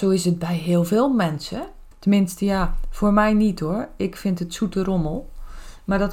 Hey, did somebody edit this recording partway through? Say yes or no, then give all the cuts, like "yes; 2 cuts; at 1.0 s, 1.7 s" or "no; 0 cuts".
yes; 1 cut; at 1.9 s